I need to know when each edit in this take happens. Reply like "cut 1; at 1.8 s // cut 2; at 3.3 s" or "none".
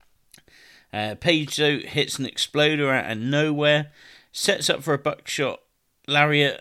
none